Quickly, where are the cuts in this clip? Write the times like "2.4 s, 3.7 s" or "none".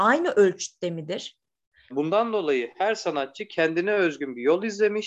1.9 s